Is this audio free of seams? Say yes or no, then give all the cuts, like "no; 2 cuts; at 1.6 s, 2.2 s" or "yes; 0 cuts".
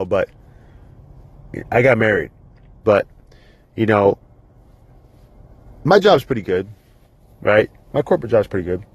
no; 1 cut; at 2.8 s